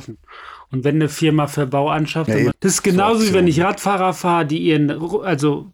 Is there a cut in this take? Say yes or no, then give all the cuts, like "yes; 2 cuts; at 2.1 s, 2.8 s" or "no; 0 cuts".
yes; 1 cut; at 2.5 s